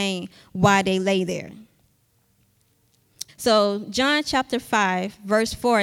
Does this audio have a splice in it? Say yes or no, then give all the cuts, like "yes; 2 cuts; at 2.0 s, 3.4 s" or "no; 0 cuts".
yes; 1 cut; at 3.3 s